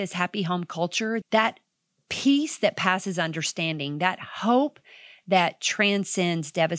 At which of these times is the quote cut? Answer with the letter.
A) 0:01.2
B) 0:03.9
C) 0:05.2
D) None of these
A